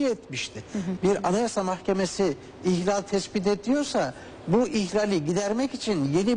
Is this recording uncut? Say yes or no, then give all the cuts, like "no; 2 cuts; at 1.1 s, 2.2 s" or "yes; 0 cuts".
no; 1 cut; at 1.0 s